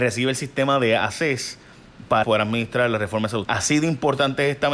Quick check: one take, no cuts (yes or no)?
no